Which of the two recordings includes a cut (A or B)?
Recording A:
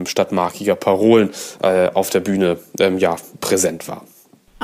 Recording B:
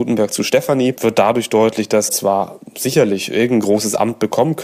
B